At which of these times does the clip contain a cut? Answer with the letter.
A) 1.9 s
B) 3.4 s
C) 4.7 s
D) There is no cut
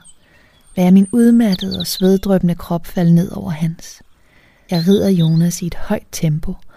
C